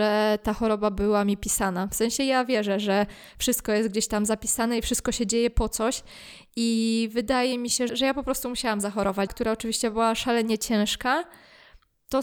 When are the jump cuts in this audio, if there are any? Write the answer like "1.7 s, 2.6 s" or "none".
7.9 s, 9.3 s